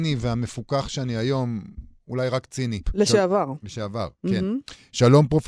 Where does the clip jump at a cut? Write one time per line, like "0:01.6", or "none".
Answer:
0:02.8